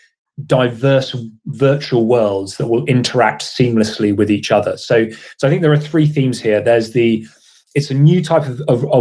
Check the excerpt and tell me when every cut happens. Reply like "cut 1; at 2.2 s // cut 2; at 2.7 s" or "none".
none

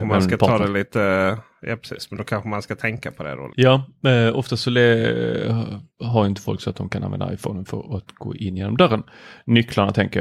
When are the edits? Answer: cut 1; at 3.5 s

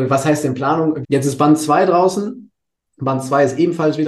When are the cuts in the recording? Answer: cut 1; at 1.0 s

